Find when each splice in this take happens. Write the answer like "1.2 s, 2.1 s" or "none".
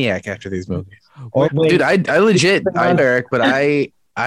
1.5 s, 3.0 s